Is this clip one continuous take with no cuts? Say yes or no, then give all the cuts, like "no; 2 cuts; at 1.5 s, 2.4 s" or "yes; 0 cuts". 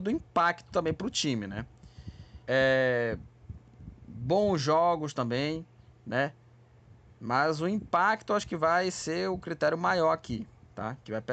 no; 1 cut; at 2.4 s